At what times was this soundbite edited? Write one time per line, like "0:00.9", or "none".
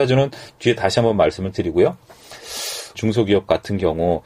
0:02.9